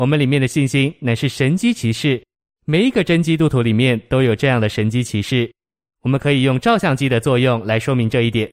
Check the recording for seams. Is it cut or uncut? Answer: uncut